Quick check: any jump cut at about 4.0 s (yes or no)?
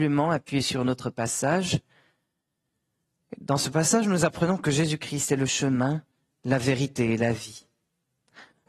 no